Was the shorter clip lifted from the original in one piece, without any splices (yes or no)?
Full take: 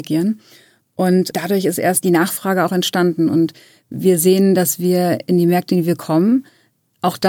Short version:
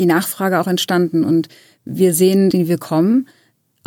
no